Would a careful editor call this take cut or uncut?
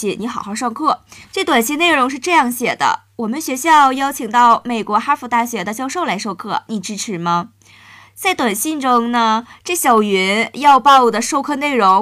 cut